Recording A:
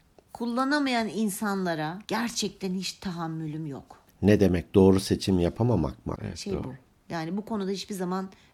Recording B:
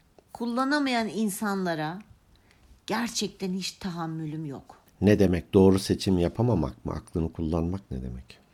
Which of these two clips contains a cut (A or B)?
A